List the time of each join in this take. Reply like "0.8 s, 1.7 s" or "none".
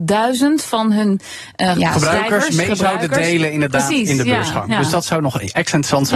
1.7 s